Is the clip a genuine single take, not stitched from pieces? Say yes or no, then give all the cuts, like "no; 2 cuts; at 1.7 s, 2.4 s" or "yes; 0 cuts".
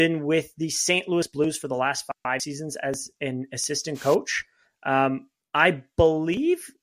yes; 0 cuts